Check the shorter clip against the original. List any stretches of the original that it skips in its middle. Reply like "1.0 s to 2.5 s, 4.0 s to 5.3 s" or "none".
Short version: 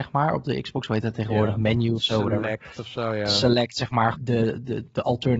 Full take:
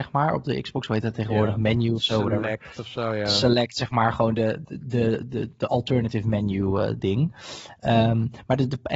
4.1 s to 4.8 s